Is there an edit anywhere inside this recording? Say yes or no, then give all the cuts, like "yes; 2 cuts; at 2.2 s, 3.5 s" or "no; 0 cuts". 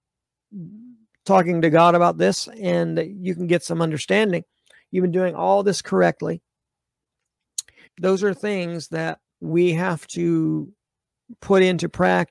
yes; 2 cuts; at 7.8 s, 9.3 s